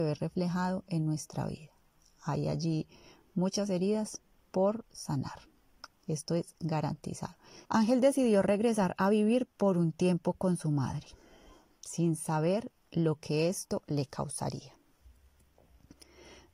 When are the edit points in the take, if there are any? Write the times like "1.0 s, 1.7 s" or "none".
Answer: 5.9 s, 7.7 s